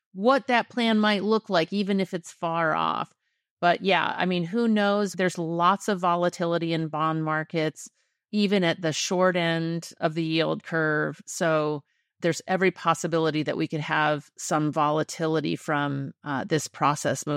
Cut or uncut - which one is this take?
uncut